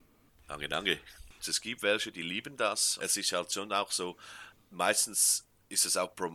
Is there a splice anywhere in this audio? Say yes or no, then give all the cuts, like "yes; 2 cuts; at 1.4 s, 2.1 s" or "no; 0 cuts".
yes; 2 cuts; at 1.4 s, 3.0 s